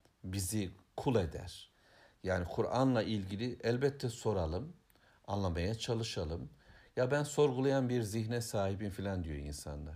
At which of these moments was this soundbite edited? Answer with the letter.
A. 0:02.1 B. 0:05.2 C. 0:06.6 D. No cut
D